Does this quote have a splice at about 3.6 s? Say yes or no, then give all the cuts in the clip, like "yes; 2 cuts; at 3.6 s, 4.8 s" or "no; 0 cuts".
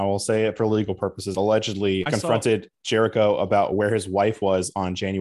no; 1 cut; at 2.1 s